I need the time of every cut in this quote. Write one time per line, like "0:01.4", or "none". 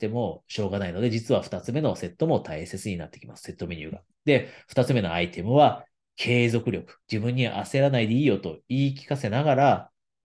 0:07.0

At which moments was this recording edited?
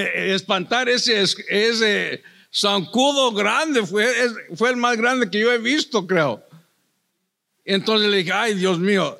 none

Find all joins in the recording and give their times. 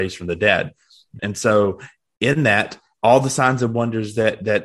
0:01.2

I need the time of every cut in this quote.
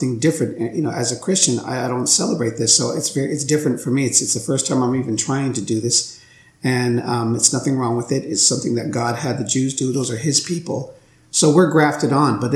none

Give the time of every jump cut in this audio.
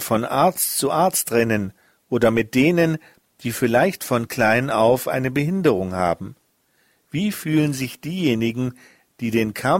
none

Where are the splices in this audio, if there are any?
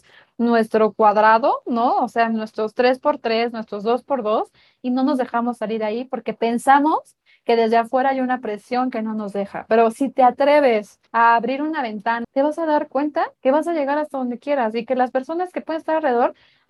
0:11.1
0:12.2
0:13.4

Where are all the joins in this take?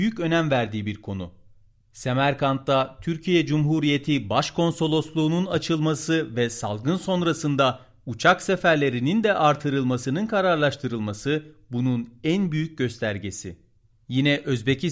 0:01.8

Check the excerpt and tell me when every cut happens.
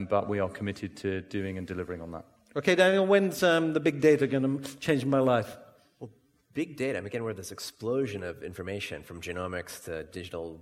none

